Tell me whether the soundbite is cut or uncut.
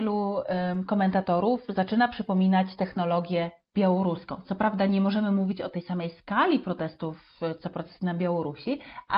uncut